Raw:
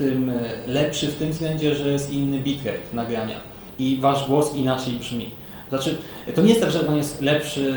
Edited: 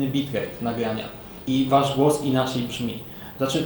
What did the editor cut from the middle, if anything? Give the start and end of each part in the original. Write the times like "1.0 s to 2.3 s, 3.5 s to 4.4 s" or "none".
none